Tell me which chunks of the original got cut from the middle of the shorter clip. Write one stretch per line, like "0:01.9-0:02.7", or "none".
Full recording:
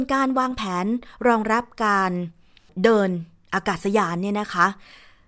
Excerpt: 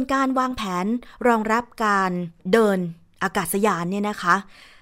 0:02.4-0:02.7